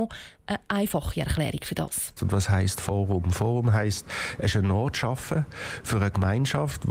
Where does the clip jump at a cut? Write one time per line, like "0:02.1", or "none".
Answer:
0:02.2